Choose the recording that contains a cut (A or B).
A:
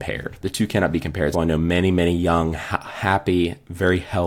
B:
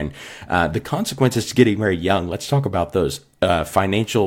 A